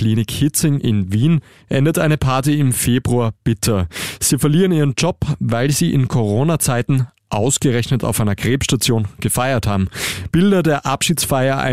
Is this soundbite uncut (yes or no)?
yes